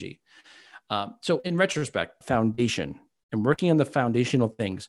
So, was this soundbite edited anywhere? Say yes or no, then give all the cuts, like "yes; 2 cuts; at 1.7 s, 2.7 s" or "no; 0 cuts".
yes; 1 cut; at 2.2 s